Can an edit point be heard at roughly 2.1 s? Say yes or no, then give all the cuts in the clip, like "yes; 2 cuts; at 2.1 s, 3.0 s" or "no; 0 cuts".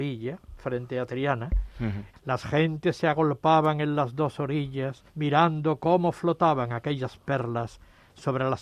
yes; 2 cuts; at 2.1 s, 5.1 s